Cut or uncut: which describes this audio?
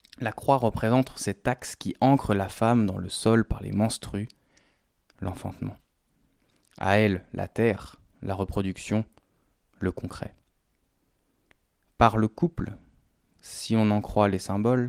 uncut